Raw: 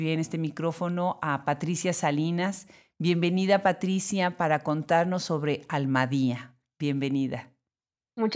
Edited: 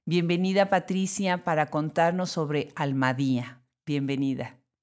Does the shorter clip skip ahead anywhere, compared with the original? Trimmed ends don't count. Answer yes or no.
no